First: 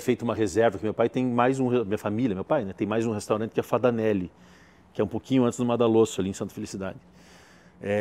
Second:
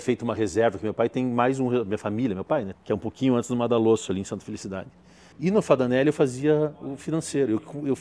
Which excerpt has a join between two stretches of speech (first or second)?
second